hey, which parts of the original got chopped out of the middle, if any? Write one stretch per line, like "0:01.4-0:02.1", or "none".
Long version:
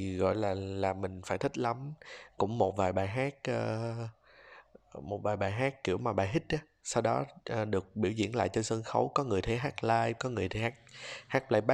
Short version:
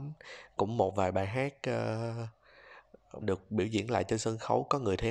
0:05.0-0:07.7